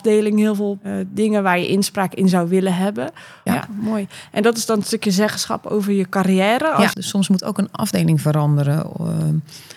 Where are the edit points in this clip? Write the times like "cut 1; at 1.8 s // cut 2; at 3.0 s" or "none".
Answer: cut 1; at 3.5 s // cut 2; at 6.9 s